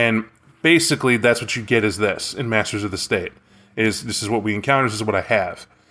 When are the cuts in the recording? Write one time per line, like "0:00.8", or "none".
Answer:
none